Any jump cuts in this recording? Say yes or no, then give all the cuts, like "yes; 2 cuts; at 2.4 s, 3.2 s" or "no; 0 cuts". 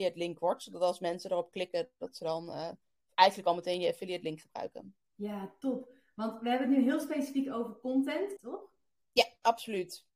yes; 2 cuts; at 5.0 s, 8.4 s